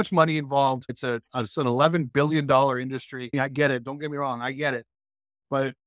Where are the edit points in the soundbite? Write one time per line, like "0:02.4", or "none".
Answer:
0:03.3